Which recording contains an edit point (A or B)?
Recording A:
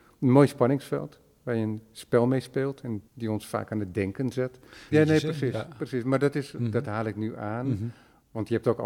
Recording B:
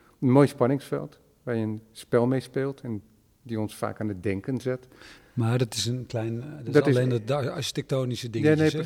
A